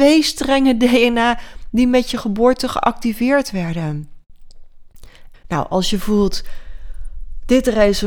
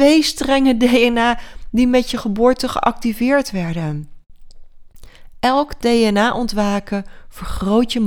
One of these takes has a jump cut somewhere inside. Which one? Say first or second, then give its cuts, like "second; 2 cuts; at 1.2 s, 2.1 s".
first; 1 cut; at 5.3 s